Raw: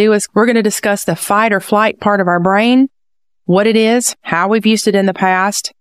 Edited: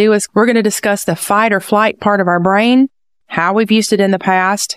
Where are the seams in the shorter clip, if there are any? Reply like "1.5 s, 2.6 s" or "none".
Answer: 3.2 s